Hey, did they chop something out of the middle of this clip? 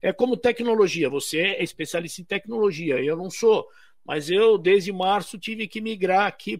no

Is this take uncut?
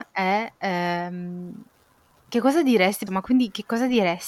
no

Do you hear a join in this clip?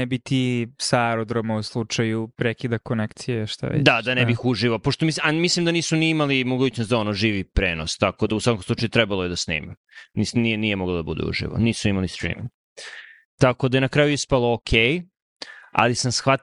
no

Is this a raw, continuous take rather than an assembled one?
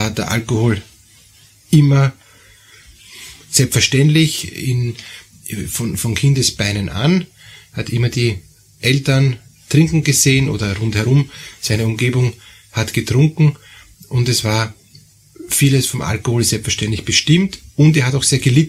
yes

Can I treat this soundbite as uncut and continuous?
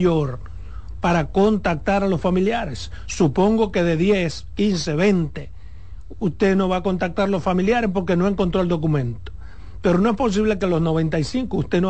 yes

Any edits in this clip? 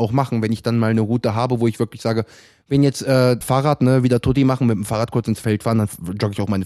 yes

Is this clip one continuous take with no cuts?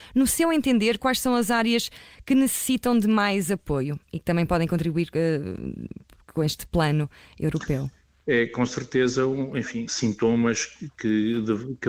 no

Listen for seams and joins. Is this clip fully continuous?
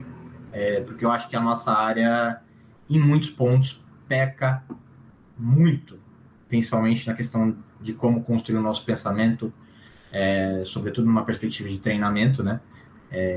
yes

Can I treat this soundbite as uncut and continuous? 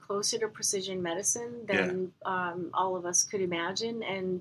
yes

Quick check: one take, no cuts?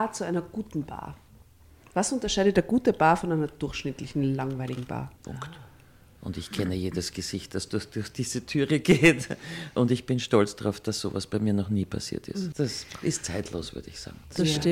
no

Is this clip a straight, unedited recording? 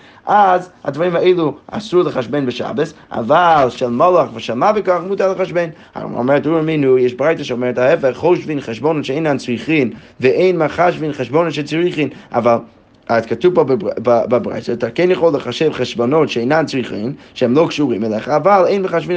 yes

